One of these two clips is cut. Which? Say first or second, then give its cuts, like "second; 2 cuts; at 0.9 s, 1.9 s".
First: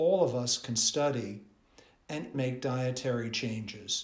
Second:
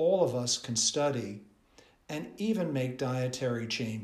first; 1 cut; at 2.3 s